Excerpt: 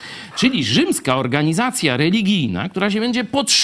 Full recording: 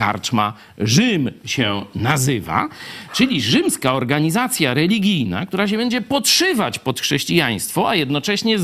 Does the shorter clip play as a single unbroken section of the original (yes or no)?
yes